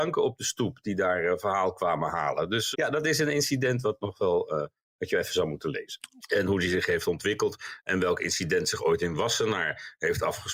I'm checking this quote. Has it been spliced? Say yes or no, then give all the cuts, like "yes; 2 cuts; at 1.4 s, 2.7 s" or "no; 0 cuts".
yes; 2 cuts; at 2.7 s, 6.2 s